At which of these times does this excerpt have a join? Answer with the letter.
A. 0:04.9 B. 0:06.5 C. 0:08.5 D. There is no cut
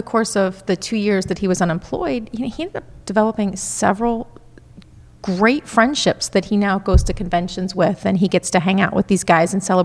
D